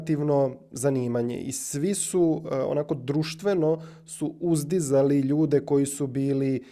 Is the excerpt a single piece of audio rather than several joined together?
yes; 0 cuts

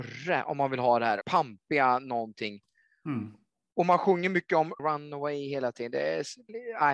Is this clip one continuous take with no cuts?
no; 2 cuts; at 1.2 s, 4.8 s

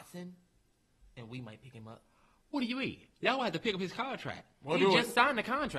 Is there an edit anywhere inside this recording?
no; 0 cuts

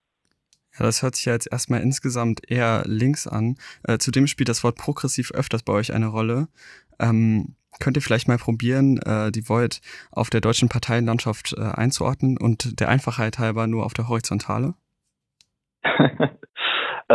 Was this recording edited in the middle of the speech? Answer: yes; 1 cut; at 3.8 s

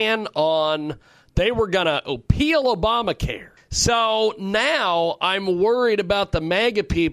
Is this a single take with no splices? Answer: no; 1 cut; at 3.6 s

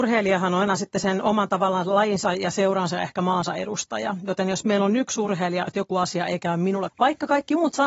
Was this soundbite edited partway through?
yes; 2 cuts; at 5.7 s, 6.9 s

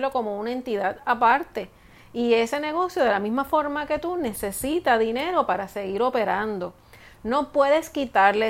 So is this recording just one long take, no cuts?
yes; 0 cuts

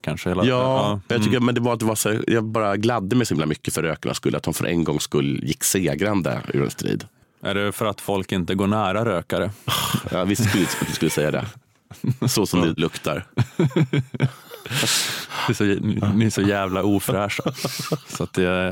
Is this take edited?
yes; 1 cut; at 12.8 s

